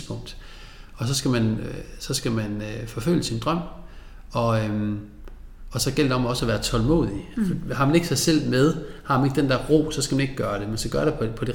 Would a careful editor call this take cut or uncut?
cut